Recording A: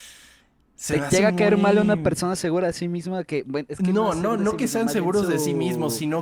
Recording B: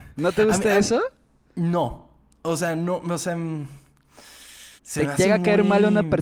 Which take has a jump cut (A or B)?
B